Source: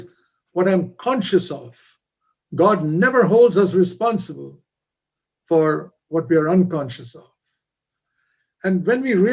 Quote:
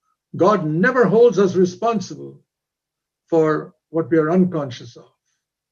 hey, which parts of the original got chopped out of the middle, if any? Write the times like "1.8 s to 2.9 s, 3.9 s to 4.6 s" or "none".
none